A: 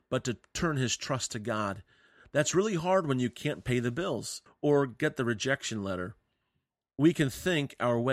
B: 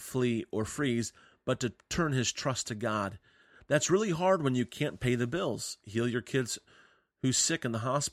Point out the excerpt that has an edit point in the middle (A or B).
A